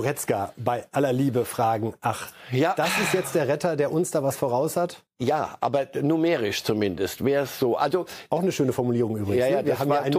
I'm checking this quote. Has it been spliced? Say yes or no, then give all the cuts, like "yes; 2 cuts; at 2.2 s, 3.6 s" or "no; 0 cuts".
no; 0 cuts